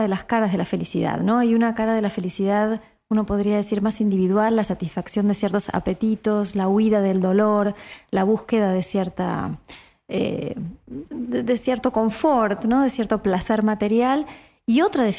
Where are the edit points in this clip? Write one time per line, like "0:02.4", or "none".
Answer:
none